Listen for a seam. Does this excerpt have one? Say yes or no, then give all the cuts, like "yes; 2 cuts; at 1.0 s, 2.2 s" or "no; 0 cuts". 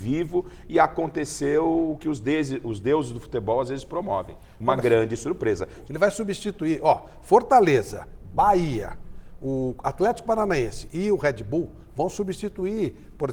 yes; 1 cut; at 5.8 s